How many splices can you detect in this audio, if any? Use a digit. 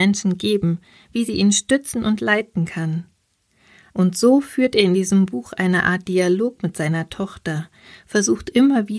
1